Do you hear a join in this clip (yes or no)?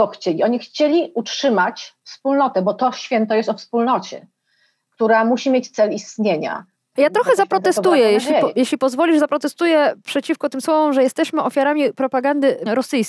yes